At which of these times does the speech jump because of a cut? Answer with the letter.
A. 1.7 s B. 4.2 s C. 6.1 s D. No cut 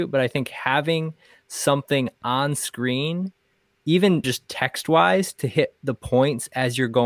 B